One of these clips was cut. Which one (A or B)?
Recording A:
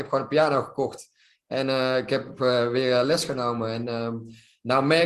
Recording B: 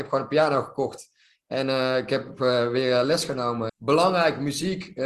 B